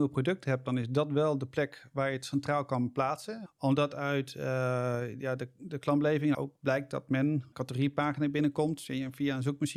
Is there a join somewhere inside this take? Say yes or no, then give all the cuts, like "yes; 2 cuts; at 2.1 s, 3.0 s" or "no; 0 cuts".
yes; 3 cuts; at 3.5 s, 6.3 s, 7.5 s